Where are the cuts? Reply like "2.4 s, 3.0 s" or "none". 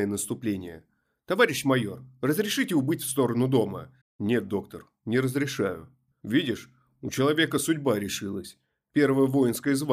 4.0 s